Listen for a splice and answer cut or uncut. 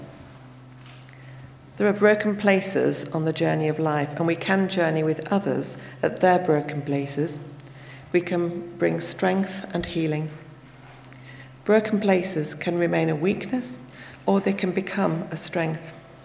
uncut